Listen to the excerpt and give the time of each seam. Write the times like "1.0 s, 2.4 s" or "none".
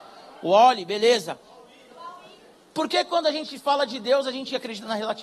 none